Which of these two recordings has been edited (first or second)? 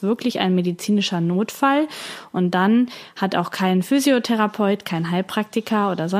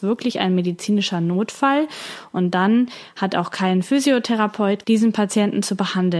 second